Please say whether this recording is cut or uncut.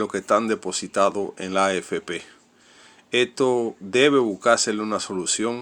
uncut